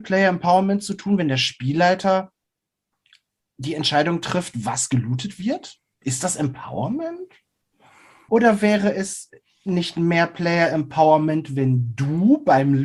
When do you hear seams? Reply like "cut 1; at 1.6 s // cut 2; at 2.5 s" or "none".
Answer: cut 1; at 8.3 s